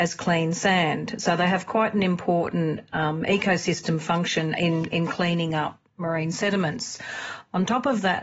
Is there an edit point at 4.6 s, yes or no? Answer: no